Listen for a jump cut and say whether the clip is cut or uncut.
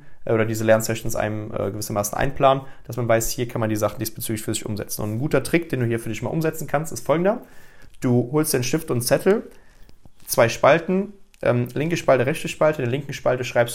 uncut